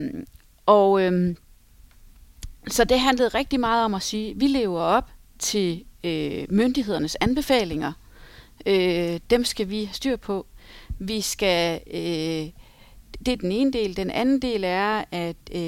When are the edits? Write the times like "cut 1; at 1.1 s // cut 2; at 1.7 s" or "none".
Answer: none